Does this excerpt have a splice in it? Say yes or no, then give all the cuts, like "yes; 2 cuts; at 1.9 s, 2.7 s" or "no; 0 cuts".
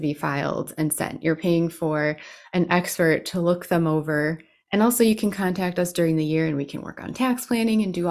no; 0 cuts